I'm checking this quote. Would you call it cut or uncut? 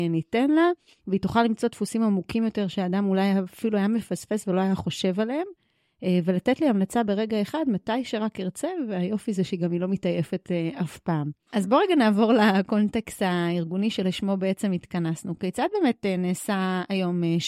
uncut